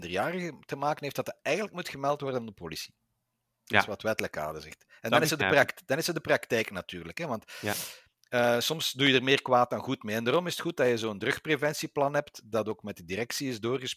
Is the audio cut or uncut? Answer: uncut